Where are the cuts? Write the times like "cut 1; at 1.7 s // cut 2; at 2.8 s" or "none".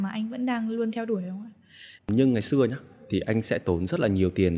cut 1; at 2.0 s